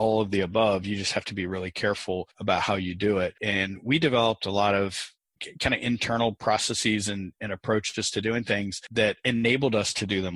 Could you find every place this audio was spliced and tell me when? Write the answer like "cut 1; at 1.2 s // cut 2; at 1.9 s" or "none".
cut 1; at 3.4 s